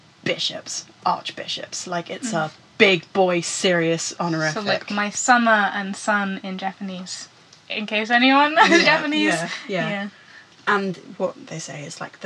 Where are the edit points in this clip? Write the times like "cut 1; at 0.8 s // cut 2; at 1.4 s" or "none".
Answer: none